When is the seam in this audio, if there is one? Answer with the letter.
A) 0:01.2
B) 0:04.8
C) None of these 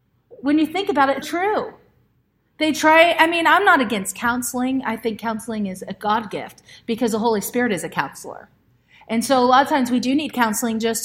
A